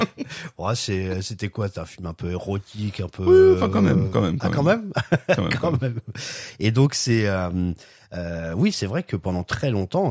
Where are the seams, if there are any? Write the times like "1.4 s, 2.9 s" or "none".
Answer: none